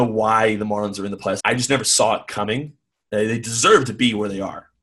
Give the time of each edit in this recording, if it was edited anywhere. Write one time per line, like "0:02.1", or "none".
0:01.4